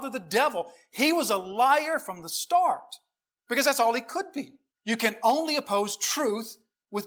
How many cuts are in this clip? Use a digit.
1